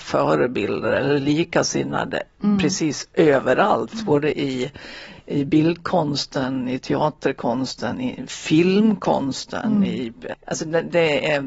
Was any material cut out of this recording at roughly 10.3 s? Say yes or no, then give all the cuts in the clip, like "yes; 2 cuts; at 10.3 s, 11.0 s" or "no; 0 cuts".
yes; 1 cut; at 10.3 s